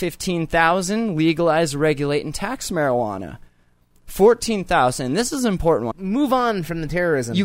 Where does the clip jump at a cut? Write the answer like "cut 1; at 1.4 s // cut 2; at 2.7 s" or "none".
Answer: cut 1; at 5.9 s